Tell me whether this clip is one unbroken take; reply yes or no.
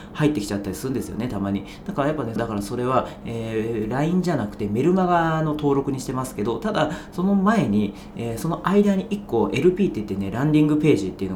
no